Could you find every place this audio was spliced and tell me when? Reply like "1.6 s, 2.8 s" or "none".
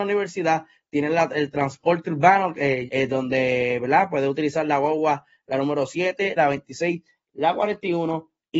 2.9 s, 6.4 s